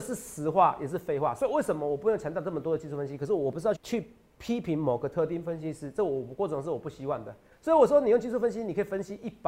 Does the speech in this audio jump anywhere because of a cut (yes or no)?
yes